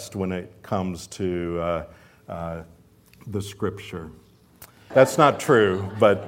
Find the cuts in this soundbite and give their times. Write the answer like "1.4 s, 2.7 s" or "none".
4.9 s